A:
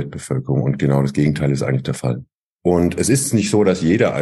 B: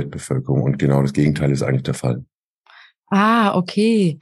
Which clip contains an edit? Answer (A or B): A